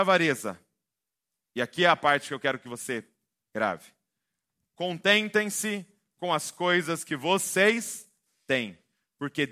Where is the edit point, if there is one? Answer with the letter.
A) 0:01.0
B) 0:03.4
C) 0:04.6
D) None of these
D